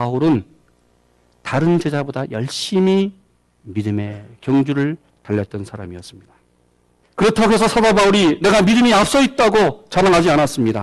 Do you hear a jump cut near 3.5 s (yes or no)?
no